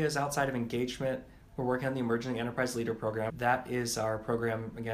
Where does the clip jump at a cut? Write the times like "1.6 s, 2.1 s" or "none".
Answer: 3.3 s